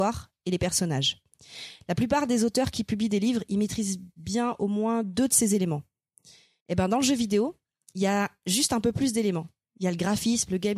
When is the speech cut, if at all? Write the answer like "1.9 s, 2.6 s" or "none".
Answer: 6.6 s